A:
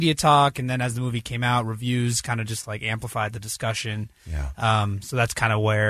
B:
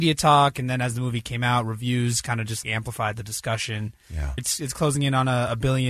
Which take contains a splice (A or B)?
B